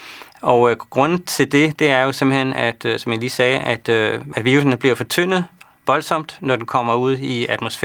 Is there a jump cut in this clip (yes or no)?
no